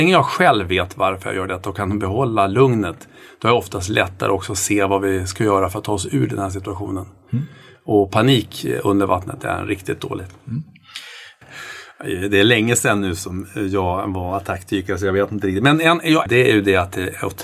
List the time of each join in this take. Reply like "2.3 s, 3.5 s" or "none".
11.4 s, 16.3 s